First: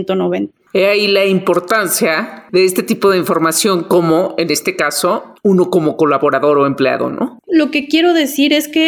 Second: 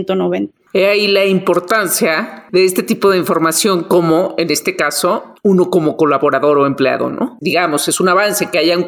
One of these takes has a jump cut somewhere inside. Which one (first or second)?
second